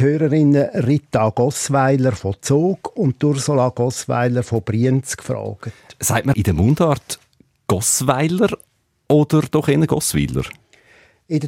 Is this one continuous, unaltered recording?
no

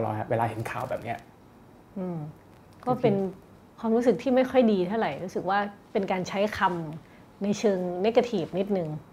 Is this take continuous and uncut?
yes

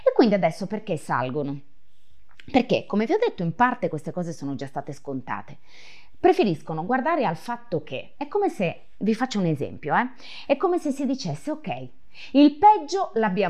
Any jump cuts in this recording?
no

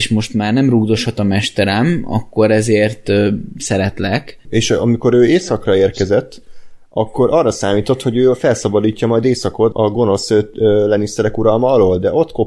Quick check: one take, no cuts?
no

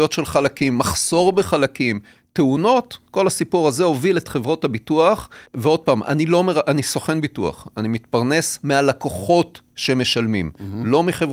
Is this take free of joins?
no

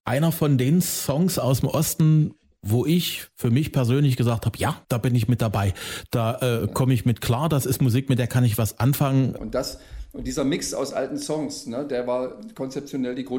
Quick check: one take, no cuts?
no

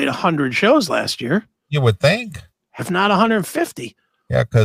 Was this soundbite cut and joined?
yes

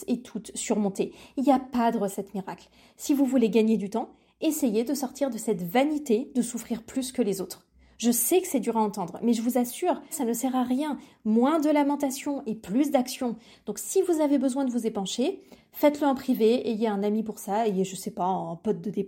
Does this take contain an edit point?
yes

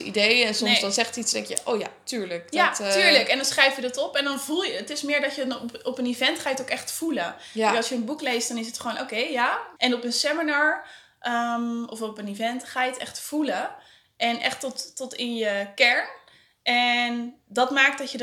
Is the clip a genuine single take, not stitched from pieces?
no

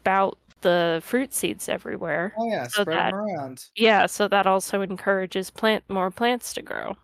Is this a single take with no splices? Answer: yes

